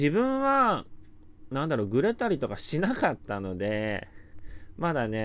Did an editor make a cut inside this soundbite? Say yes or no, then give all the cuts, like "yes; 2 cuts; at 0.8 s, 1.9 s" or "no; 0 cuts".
no; 0 cuts